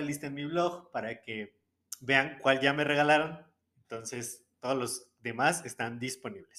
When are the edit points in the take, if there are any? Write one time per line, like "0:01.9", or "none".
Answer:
none